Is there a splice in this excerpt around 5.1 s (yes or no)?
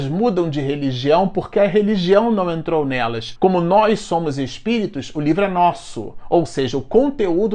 no